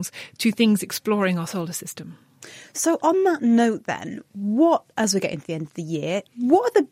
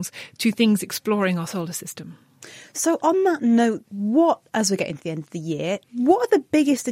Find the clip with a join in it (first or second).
second